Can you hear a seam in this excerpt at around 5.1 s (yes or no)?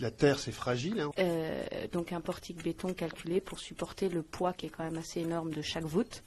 no